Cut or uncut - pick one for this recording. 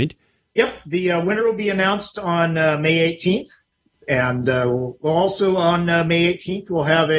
uncut